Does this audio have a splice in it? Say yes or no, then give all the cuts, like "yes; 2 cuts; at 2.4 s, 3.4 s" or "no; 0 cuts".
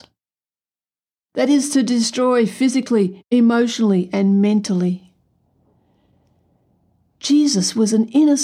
yes; 1 cut; at 1.1 s